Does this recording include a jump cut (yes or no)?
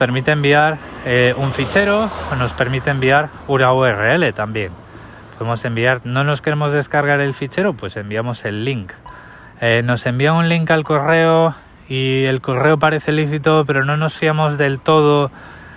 no